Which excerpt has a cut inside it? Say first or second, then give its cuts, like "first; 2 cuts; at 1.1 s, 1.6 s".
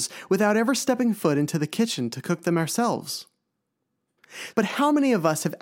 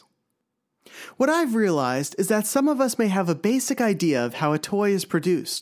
first; 1 cut; at 4.5 s